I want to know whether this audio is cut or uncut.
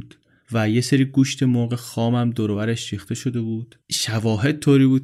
cut